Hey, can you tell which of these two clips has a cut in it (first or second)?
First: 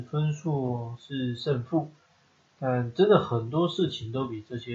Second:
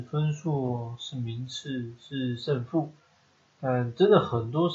first